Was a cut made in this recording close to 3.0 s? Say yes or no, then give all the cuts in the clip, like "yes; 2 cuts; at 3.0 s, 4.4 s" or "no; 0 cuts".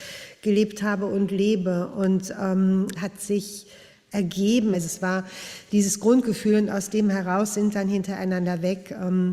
yes; 2 cuts; at 3.0 s, 4.7 s